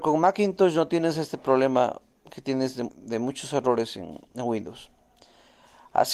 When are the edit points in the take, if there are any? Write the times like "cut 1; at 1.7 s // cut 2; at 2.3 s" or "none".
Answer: cut 1; at 2.9 s